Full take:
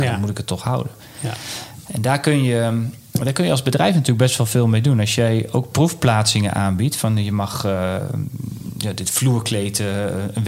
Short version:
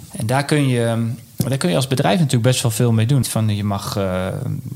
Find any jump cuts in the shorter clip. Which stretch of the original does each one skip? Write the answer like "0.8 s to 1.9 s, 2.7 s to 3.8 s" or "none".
5.0 s to 6.9 s